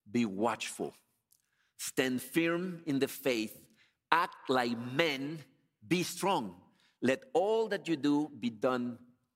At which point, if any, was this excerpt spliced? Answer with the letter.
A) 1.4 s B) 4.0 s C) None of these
C